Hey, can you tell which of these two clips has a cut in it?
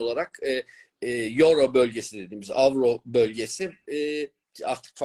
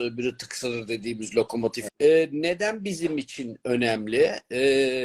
second; 1 cut; at 1.9 s

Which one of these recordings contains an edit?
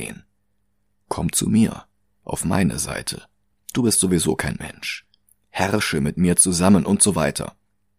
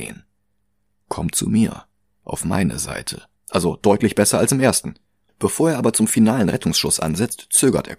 second; 2 cuts; at 3.4 s, 5.3 s

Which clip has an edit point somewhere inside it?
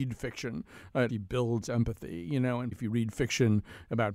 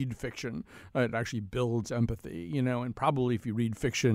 first; 2 cuts; at 1.1 s, 2.7 s

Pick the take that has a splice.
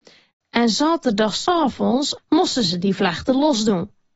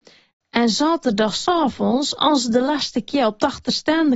first; 1 cut; at 2.2 s

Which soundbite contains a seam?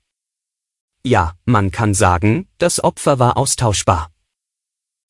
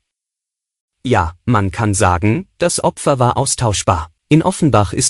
second; 1 cut; at 4.2 s

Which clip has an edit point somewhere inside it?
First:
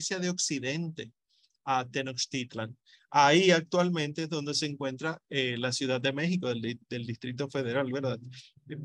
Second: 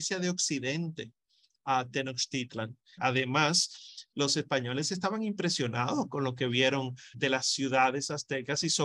second; 2 cuts; at 3.0 s, 7.1 s

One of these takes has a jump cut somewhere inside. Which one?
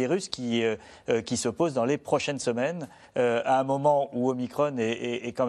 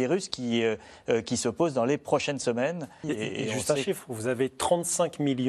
second; 1 cut; at 3.0 s

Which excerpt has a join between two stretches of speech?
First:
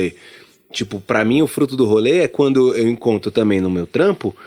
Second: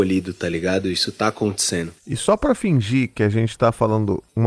second; 1 cut; at 2.0 s

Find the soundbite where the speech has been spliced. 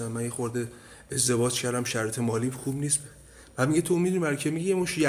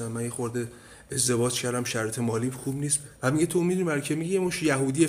second; 1 cut; at 3.2 s

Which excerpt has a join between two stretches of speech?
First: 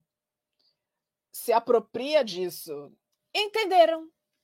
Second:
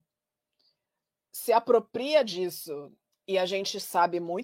first; 1 cut; at 3.2 s

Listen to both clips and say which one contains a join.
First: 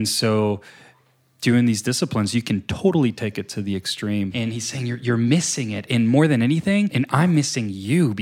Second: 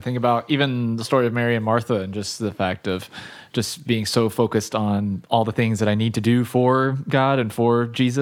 first; 2 cuts; at 4.3 s, 6.9 s

